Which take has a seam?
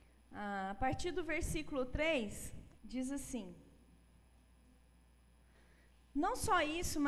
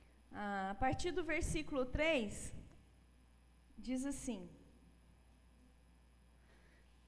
first; 1 cut; at 2.8 s

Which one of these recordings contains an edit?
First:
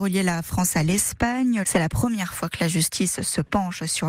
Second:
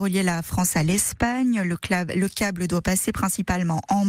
first; 1 cut; at 1.6 s

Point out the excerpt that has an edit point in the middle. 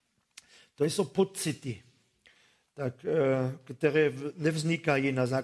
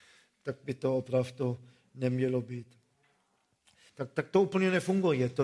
second; 1 cut; at 3.9 s

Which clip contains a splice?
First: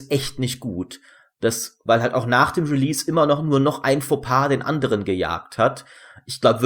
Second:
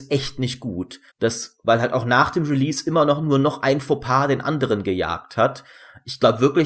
second; 1 cut; at 1.1 s

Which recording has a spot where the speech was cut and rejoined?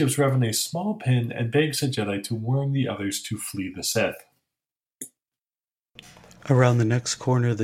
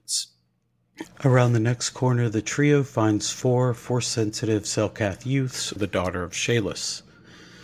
second; 2 cuts; at 1.0 s, 5.8 s

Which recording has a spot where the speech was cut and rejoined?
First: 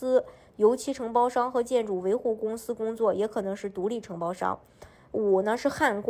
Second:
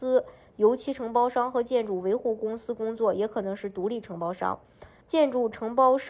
second; 1 cut; at 5.0 s

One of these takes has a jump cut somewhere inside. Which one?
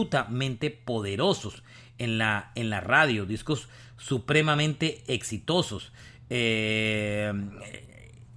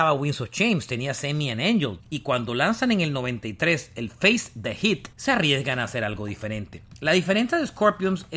second; 2 cuts; at 2.0 s, 5.1 s

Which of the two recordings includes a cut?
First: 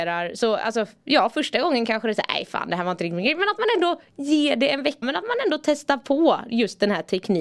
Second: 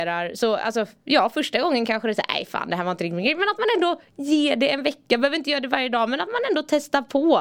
first; 1 cut; at 5.0 s

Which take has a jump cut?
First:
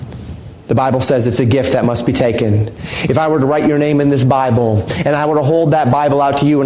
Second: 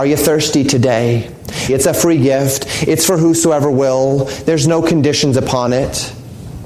second; 1 cut; at 1.7 s

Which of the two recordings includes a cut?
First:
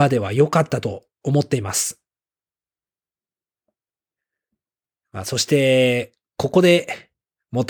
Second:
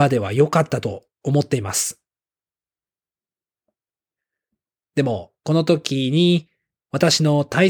second; 1 cut; at 4.8 s

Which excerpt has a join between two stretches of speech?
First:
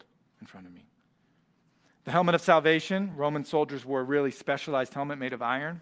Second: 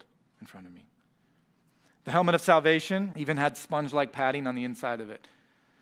second; 1 cut; at 3.1 s

